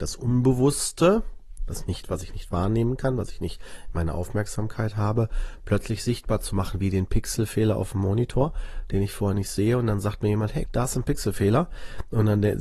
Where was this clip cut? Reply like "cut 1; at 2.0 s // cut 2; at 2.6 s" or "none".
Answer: cut 1; at 10.7 s